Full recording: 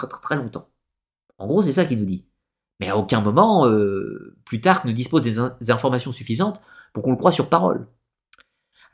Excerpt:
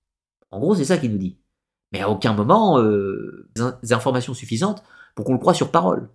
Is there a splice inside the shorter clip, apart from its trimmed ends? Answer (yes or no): yes